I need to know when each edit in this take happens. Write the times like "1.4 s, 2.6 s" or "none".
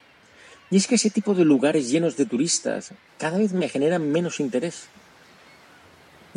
3.1 s